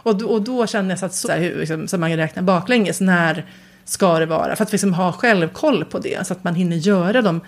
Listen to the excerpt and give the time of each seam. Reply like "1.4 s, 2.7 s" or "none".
1.2 s